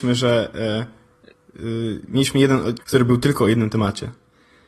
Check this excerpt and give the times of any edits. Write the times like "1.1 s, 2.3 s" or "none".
2.8 s